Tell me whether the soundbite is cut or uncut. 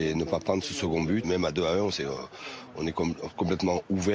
cut